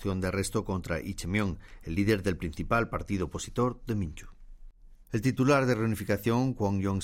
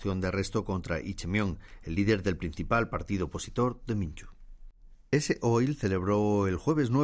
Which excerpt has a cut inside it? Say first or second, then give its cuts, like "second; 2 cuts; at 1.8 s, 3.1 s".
first; 1 cut; at 5.0 s